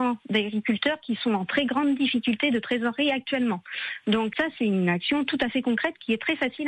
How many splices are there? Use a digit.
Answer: 1